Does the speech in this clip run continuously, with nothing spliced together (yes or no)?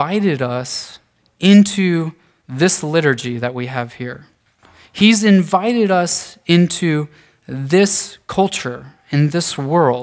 yes